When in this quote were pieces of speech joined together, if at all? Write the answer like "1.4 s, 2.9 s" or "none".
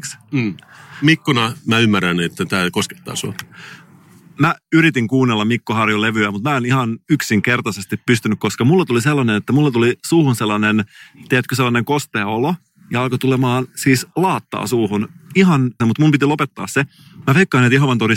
15.8 s, 17.2 s